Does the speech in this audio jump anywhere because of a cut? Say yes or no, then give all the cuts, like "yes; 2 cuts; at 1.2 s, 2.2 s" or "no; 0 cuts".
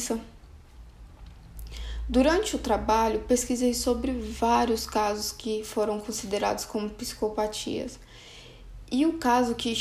no; 0 cuts